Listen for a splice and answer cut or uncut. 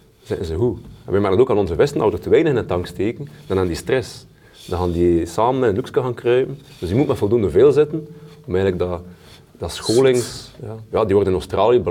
uncut